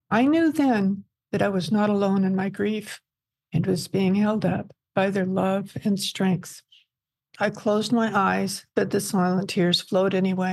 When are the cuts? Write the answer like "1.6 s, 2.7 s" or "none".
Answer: 7.2 s, 8.7 s